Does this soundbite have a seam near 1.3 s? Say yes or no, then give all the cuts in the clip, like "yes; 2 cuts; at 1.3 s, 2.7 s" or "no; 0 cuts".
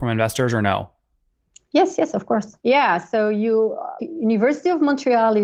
no; 2 cuts; at 2.6 s, 4.0 s